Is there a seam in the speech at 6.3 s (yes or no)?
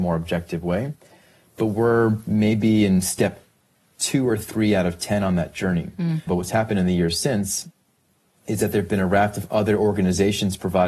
yes